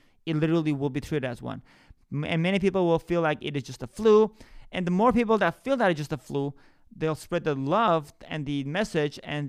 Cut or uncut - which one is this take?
uncut